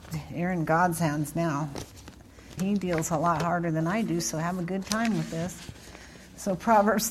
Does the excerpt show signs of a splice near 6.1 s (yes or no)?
no